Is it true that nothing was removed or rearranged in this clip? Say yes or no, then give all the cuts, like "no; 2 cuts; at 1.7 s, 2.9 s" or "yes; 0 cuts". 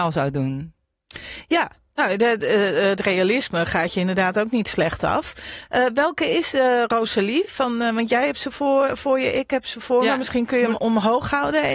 yes; 0 cuts